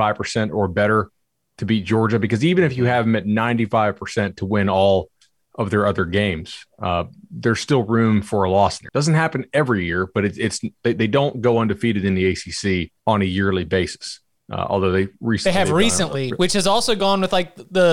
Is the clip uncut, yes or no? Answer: no